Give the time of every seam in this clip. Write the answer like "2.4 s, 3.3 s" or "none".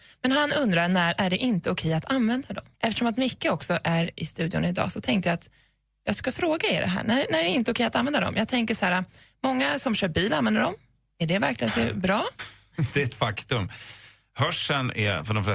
2.7 s, 12.4 s

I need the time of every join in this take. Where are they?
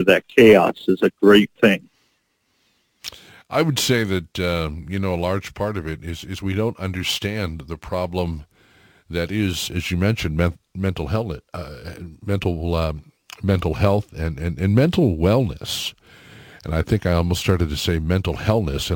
none

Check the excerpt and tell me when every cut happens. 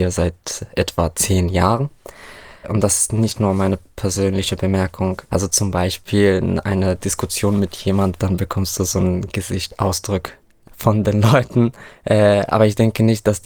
2.6 s, 5.3 s, 8.2 s

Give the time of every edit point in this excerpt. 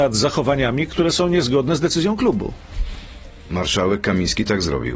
none

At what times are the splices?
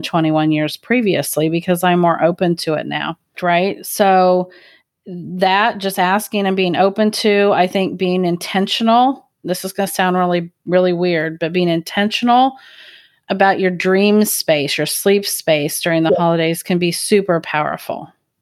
3.3 s

